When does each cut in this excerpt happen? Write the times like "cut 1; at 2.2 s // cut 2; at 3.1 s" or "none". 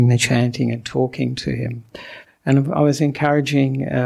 cut 1; at 2.3 s